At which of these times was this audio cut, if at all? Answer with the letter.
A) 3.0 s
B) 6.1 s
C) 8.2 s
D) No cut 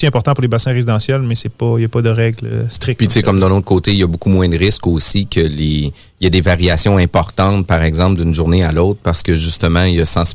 D